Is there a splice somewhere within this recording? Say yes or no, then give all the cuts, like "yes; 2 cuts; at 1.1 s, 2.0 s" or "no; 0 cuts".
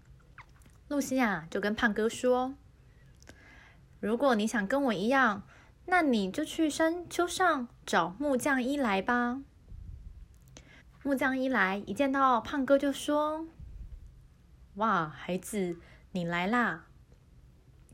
yes; 1 cut; at 10.8 s